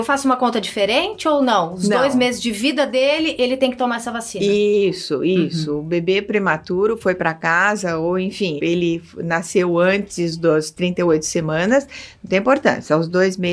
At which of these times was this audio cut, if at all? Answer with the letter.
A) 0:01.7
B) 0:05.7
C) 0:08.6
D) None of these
C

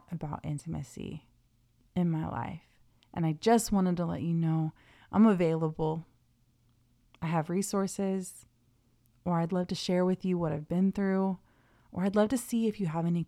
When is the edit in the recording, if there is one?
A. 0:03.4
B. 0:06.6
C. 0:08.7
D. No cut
D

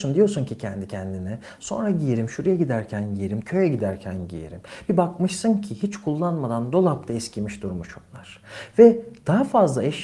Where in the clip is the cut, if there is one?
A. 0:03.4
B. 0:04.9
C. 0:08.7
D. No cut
A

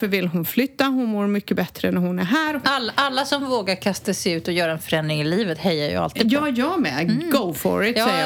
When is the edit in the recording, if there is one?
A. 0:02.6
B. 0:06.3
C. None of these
A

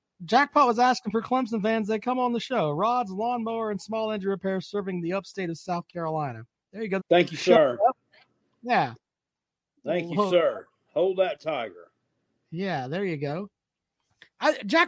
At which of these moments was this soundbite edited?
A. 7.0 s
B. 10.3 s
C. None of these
A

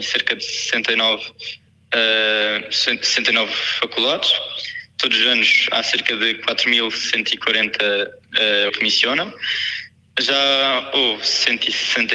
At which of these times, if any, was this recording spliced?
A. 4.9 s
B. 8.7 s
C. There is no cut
B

